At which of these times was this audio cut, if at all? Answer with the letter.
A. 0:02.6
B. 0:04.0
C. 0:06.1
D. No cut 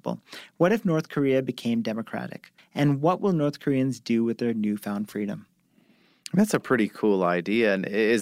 A